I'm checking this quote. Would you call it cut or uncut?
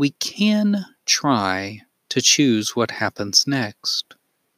uncut